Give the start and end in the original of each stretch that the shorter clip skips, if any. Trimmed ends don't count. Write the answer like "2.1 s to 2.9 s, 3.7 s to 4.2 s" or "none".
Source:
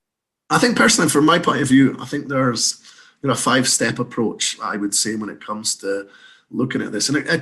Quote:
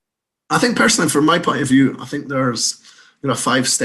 none